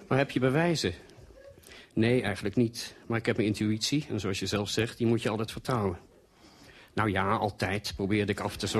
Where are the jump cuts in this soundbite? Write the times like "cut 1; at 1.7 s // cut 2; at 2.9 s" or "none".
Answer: none